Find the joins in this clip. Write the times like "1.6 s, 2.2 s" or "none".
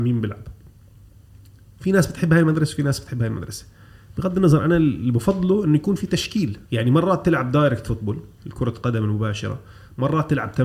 6.6 s